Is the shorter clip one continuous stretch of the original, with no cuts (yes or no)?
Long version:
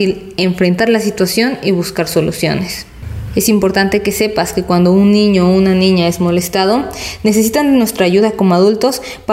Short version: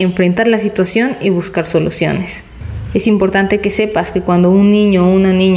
yes